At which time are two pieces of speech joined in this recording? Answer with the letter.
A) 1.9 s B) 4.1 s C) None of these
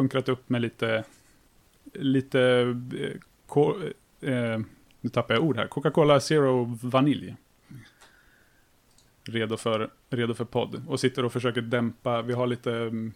A